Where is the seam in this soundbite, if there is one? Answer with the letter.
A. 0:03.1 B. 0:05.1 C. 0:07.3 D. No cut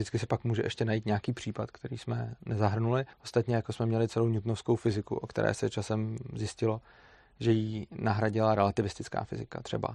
A